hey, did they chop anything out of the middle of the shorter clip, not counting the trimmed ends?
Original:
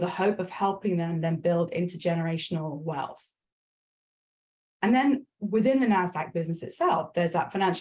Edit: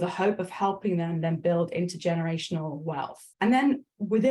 yes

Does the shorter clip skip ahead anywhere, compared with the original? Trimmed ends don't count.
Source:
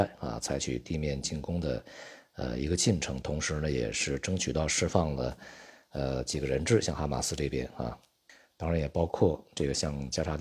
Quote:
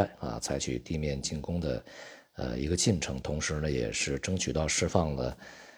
no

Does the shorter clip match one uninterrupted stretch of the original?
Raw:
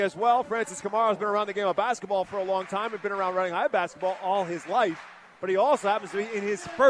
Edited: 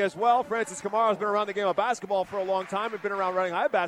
yes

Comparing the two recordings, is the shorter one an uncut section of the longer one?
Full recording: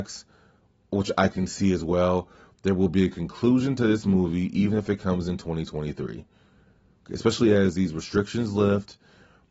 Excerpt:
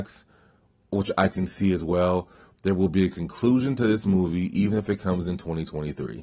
yes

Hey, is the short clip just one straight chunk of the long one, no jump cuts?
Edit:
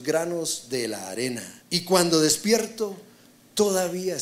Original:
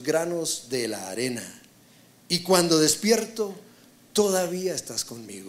no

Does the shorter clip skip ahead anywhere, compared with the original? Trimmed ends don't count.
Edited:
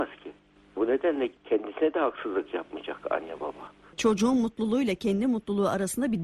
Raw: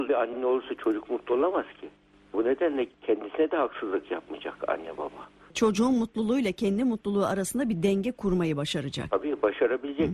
no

